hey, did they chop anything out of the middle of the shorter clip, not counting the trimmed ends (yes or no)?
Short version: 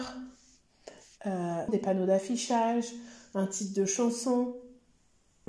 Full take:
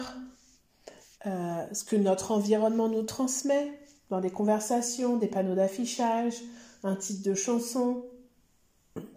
yes